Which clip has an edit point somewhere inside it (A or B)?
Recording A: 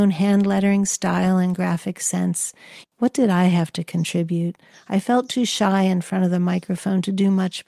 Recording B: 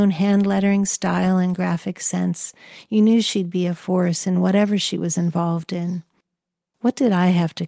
A